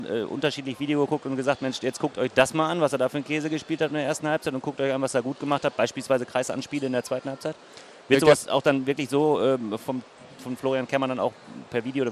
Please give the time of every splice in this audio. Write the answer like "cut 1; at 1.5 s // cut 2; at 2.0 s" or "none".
none